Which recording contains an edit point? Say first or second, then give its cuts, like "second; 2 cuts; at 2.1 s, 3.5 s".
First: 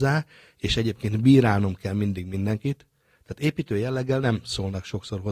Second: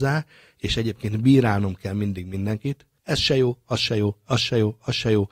second; 1 cut; at 3.0 s